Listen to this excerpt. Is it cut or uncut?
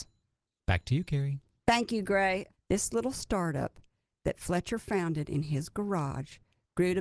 cut